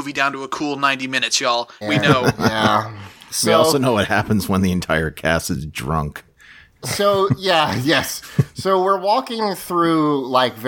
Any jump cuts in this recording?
yes; 1 cut; at 1.8 s

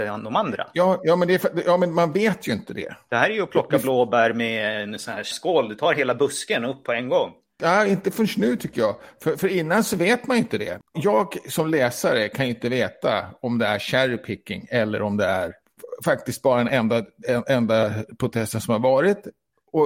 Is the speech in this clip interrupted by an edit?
no; 0 cuts

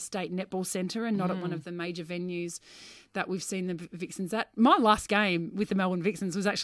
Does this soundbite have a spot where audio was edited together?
no; 0 cuts

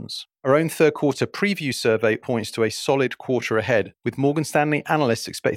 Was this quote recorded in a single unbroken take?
no; 1 cut; at 2.2 s

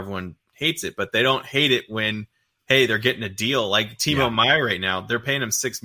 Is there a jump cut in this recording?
no; 0 cuts

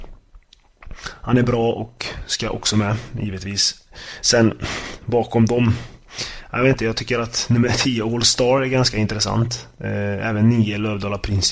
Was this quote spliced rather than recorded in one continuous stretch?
no; 0 cuts

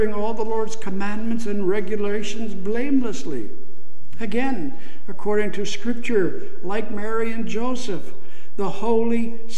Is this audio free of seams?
yes; 0 cuts

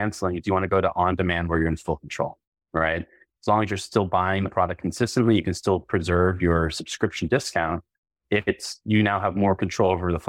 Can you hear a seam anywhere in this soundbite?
no; 0 cuts

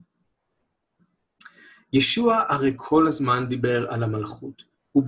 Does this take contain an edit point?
no; 0 cuts

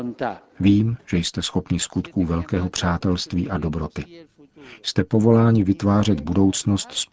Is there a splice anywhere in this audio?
no; 0 cuts

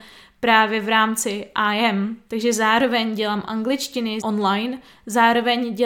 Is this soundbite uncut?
no; 2 cuts; at 2.3 s, 4.2 s

